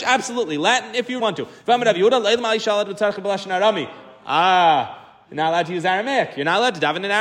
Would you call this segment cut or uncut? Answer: cut